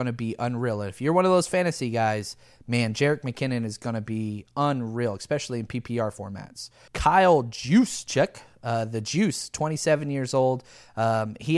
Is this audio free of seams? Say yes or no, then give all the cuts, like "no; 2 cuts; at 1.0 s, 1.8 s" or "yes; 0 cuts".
no; 1 cut; at 6.9 s